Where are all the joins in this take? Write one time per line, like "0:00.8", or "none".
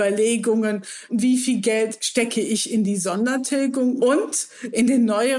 0:01.1
0:04.0